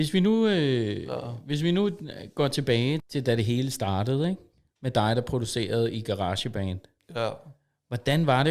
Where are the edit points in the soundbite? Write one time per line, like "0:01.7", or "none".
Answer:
0:03.0